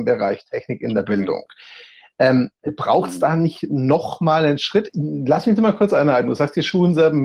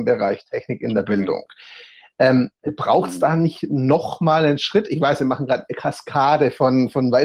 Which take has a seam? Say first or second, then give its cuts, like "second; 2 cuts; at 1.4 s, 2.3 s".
first; 1 cut; at 4.9 s